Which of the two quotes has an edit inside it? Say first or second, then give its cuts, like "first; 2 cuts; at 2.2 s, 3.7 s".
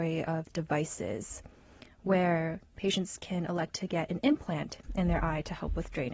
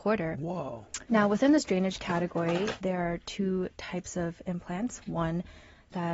second; 2 cuts; at 1.1 s, 2.8 s